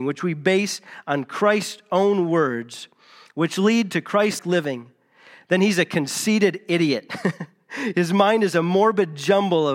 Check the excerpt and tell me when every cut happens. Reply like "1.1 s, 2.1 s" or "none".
4.4 s